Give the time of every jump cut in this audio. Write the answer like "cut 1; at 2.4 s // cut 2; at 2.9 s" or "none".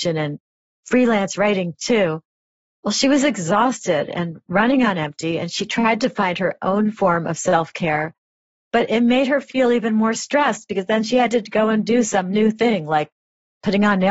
none